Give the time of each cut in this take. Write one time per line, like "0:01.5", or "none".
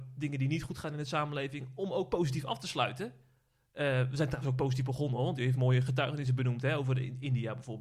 none